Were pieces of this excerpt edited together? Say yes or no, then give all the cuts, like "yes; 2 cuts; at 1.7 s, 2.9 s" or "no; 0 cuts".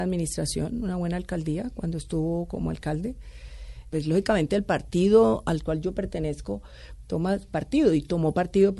yes; 2 cuts; at 3.9 s, 7.0 s